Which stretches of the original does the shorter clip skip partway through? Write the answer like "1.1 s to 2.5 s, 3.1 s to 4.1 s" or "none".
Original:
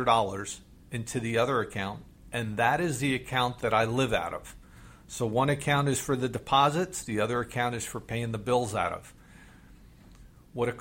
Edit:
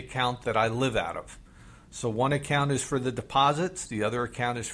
none